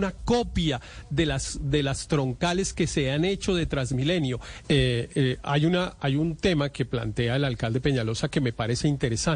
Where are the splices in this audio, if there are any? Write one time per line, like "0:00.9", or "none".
0:04.6